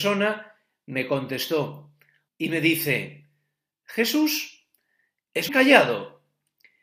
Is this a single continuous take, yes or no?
no